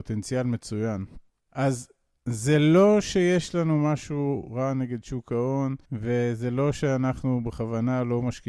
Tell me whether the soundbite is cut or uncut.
cut